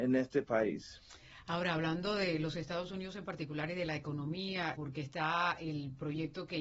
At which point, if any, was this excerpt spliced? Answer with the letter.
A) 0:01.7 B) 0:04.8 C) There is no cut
B